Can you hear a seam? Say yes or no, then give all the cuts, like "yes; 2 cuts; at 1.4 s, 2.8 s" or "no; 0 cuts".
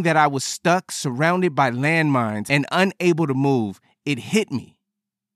no; 0 cuts